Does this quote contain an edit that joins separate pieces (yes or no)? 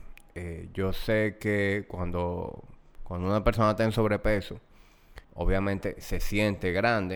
yes